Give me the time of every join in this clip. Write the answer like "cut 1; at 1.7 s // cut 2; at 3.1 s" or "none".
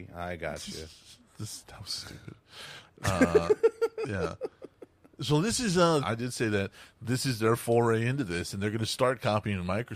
cut 1; at 6.0 s